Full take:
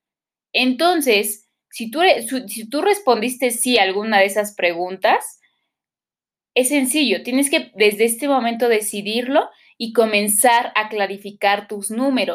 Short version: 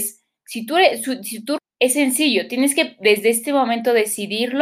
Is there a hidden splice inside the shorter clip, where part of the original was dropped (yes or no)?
yes